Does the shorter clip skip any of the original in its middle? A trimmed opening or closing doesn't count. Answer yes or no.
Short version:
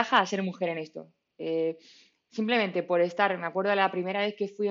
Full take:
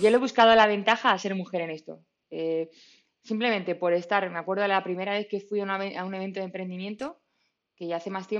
no